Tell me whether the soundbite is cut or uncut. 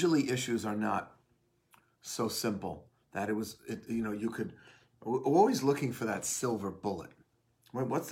uncut